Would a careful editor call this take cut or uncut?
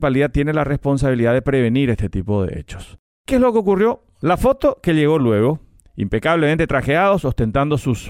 uncut